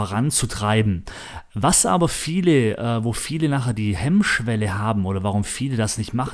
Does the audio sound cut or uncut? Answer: uncut